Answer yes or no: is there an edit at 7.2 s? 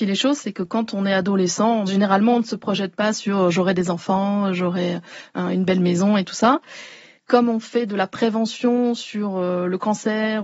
yes